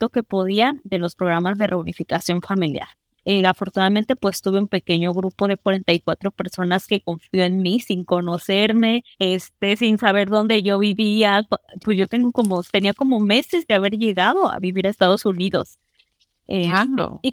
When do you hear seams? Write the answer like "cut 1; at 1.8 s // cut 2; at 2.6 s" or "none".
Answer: cut 1; at 9.1 s // cut 2; at 11.8 s

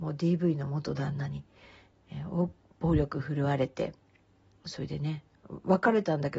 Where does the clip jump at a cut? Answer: none

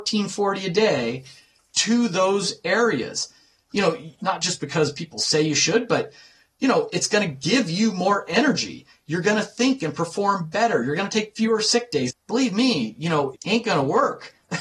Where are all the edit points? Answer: cut 1; at 4.2 s // cut 2; at 12.1 s // cut 3; at 13.3 s

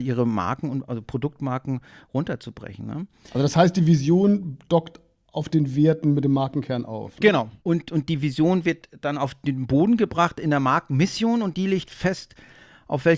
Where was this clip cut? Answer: cut 1; at 7.6 s

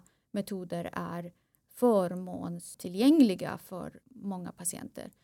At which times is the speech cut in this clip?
cut 1; at 4.0 s

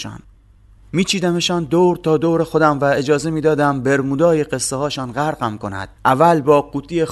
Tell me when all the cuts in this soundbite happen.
cut 1; at 6.0 s

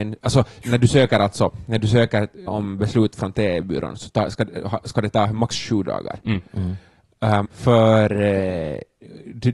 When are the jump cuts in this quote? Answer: cut 1; at 2.5 s // cut 2; at 7.5 s

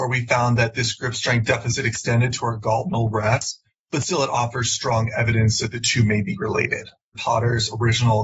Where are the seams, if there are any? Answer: cut 1; at 3.7 s // cut 2; at 7.1 s

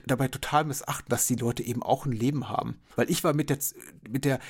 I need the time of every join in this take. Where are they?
cut 1; at 3.0 s

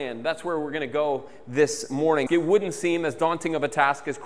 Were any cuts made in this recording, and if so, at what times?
cut 1; at 2.3 s

